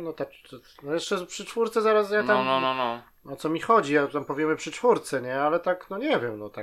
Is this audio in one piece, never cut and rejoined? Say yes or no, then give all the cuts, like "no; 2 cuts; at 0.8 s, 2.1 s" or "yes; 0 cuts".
yes; 0 cuts